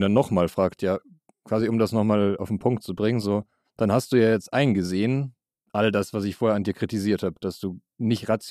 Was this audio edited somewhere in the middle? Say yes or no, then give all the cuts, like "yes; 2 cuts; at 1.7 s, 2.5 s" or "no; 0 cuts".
no; 0 cuts